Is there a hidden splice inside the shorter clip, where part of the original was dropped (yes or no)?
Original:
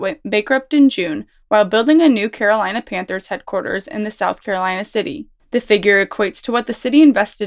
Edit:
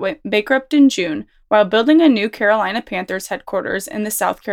no